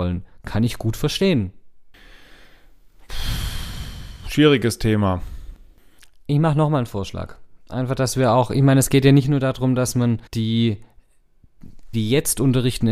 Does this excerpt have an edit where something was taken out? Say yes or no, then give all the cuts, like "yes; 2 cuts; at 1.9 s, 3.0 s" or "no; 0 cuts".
yes; 2 cuts; at 10.3 s, 11.9 s